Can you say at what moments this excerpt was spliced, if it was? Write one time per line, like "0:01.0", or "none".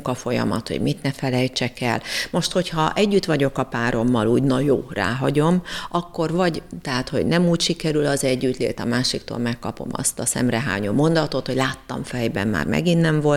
none